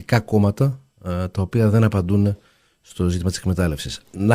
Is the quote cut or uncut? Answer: uncut